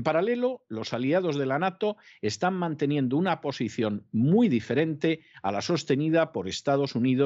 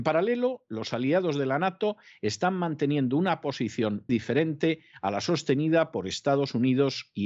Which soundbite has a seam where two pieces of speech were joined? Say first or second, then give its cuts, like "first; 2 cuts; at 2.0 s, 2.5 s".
second; 1 cut; at 4.1 s